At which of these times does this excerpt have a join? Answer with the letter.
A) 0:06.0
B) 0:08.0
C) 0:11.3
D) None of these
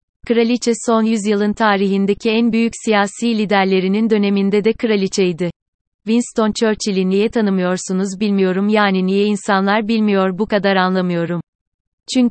A